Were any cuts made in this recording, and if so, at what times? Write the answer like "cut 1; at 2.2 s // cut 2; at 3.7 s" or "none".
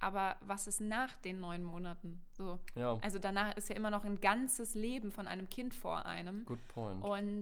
none